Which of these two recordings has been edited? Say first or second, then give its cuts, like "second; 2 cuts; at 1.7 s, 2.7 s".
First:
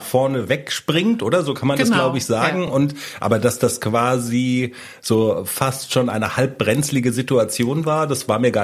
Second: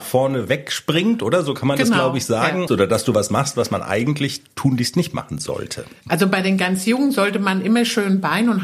second; 1 cut; at 2.7 s